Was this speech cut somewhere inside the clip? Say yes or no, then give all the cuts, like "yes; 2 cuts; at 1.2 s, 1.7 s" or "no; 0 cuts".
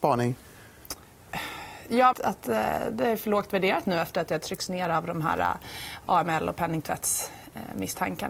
yes; 1 cut; at 2.1 s